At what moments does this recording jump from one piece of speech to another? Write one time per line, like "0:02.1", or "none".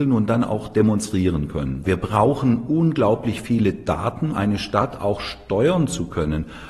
0:01.8
0:04.3